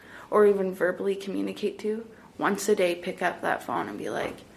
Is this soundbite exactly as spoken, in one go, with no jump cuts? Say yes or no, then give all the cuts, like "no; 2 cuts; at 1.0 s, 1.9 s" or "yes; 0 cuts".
yes; 0 cuts